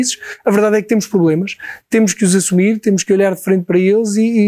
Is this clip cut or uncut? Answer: uncut